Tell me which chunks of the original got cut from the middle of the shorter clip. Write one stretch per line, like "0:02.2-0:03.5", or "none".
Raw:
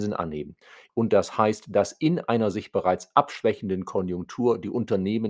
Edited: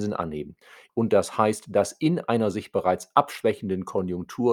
none